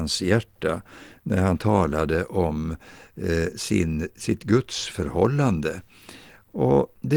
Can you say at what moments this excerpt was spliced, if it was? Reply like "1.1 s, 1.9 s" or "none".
none